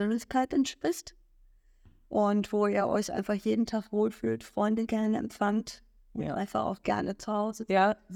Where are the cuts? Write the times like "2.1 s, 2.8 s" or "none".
none